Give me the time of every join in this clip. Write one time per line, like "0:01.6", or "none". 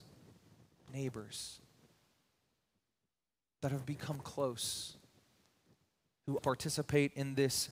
0:06.4